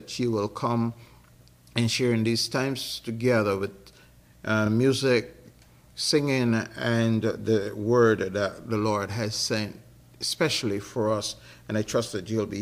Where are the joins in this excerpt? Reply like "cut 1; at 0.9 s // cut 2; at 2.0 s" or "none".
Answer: none